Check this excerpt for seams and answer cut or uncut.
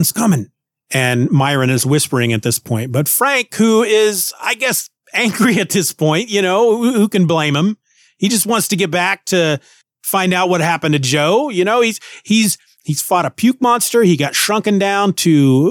uncut